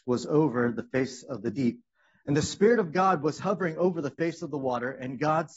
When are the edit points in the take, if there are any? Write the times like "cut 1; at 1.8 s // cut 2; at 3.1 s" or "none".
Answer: none